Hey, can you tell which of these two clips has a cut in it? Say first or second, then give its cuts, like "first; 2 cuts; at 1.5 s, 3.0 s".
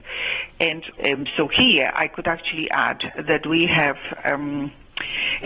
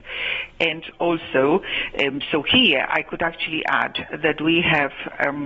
first; 1 cut; at 1.0 s